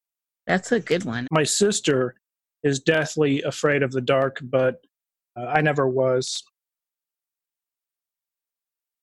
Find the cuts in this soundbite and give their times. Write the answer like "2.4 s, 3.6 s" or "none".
1.3 s